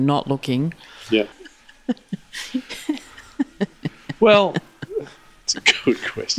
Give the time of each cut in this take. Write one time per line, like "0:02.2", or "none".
0:01.3

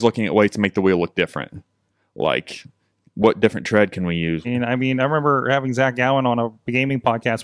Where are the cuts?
0:04.4

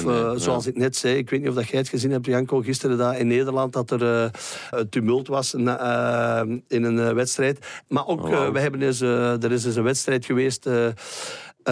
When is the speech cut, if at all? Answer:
0:04.7
0:07.9

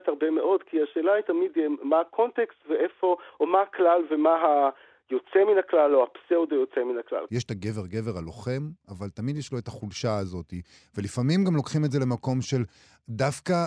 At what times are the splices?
0:07.3

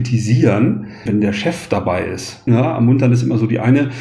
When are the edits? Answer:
0:01.1
0:02.5

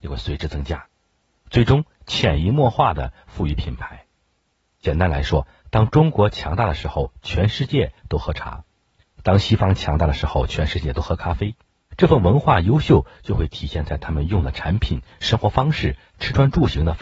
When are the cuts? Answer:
0:11.8

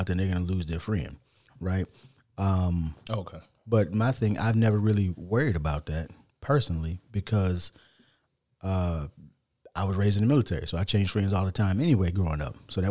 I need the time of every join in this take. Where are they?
none

